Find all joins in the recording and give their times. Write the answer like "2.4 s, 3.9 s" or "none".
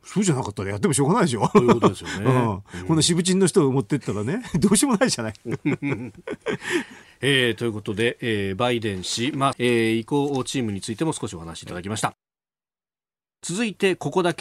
9.5 s